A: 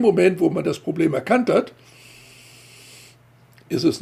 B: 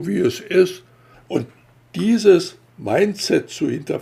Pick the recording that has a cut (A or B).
B